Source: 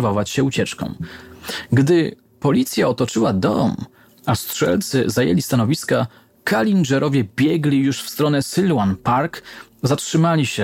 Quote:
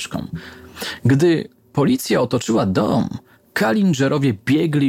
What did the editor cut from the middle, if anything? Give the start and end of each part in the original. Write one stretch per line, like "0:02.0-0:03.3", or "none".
0:04.0-0:06.2